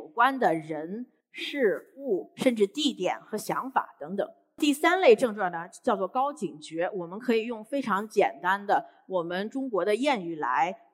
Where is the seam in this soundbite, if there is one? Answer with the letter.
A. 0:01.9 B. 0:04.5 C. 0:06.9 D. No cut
D